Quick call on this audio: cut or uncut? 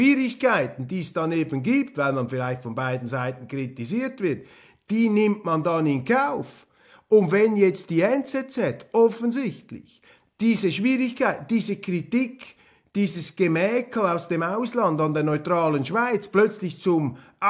uncut